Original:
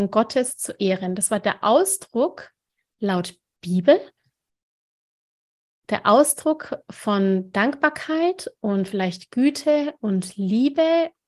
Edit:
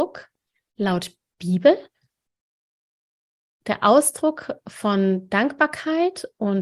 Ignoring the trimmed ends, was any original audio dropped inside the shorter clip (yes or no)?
no